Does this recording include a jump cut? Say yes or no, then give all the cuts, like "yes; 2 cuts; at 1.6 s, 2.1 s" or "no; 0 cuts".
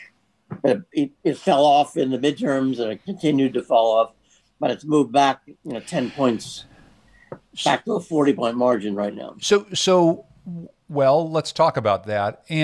no; 0 cuts